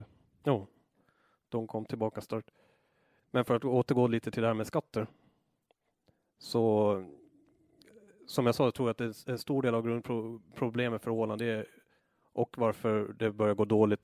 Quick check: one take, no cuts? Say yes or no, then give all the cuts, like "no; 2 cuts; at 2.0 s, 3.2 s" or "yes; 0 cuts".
no; 1 cut; at 3.2 s